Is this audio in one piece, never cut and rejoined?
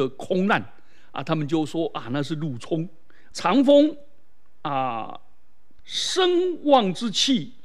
no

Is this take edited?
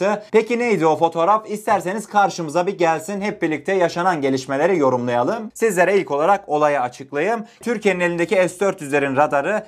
yes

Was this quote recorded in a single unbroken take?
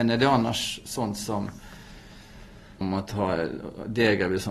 no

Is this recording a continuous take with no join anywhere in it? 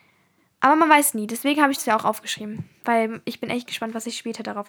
yes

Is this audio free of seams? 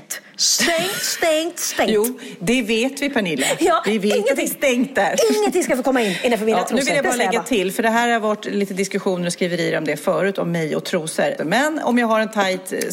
no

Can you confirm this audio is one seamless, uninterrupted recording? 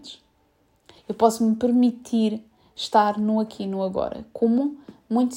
no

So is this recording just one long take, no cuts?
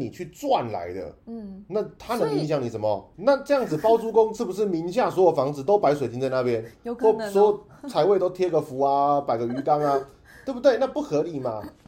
no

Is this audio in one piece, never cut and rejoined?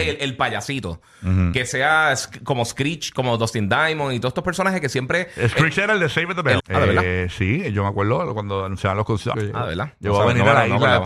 no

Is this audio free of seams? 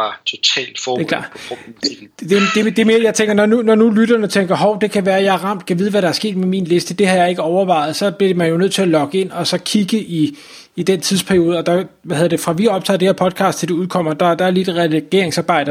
yes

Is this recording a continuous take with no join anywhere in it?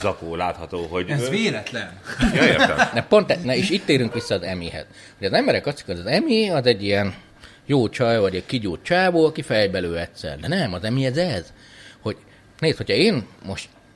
no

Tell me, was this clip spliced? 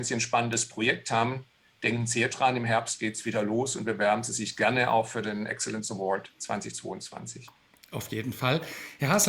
yes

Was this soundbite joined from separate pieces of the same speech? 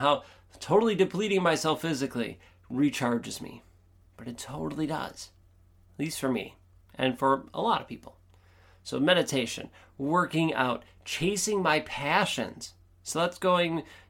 no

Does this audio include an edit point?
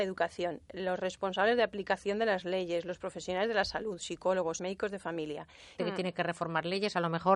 yes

